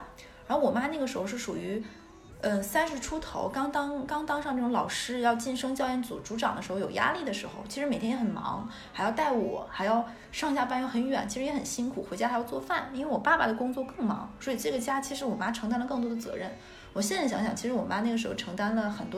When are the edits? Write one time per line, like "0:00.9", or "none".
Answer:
none